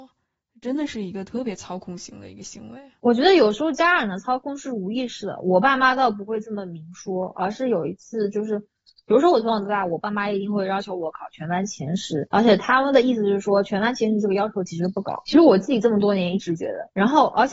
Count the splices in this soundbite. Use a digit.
0